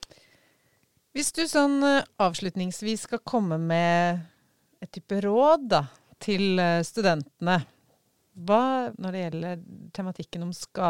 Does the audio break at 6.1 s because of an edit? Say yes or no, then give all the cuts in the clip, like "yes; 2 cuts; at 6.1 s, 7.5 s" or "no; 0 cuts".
no; 1 cut; at 8.9 s